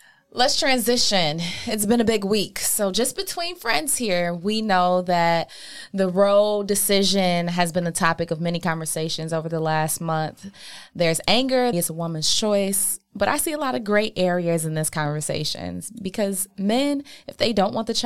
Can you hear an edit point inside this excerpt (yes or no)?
yes